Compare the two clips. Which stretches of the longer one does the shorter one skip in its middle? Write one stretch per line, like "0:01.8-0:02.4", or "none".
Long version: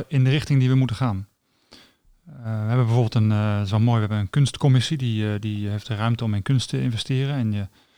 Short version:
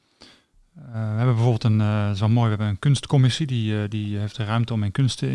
none

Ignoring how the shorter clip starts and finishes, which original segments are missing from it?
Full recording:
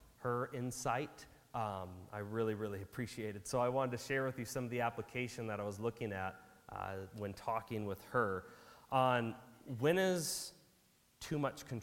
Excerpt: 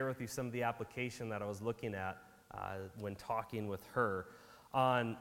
none

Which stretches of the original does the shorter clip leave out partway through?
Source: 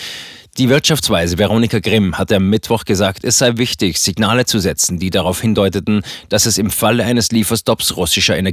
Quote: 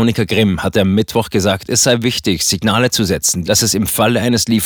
0:05.0-0:06.3

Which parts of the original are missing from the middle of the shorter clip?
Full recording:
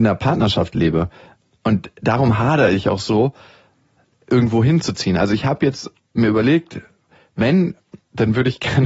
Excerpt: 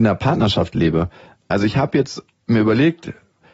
0:01.5-0:05.2

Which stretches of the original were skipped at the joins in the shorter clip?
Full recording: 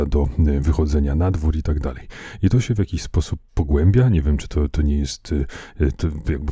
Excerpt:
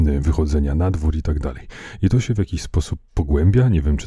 none

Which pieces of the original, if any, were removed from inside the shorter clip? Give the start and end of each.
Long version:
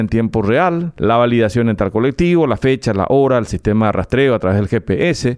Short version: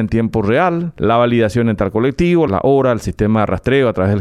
0:02.5-0:02.9

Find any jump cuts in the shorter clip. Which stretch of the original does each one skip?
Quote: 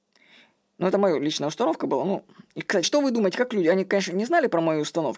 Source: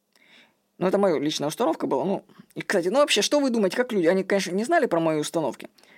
0:02.8-0:03.2

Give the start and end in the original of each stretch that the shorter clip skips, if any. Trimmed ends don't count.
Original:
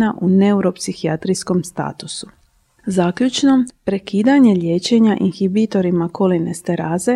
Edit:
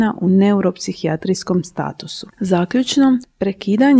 0:02.3-0:02.8

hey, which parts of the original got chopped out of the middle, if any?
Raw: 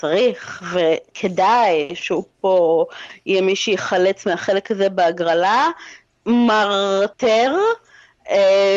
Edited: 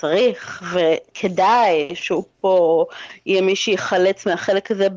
none

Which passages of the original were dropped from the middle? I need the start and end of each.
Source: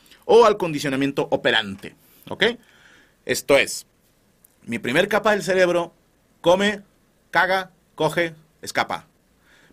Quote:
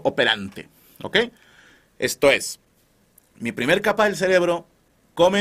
none

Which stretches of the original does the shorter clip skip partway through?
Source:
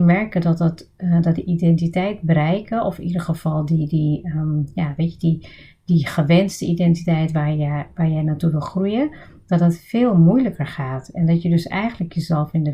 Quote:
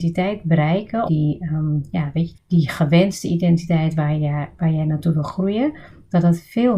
0:02.8-0:03.9
0:05.2-0:05.7

